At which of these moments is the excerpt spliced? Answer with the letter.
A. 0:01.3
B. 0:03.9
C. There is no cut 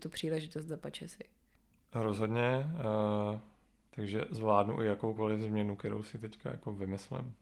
B